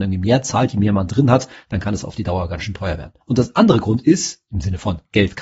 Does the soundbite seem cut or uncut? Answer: cut